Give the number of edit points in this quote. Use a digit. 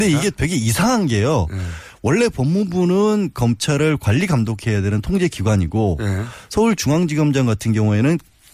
0